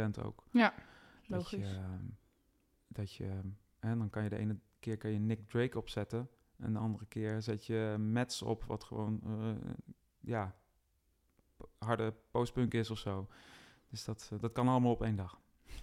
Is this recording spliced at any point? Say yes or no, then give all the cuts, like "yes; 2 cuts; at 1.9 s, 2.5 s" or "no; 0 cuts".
no; 0 cuts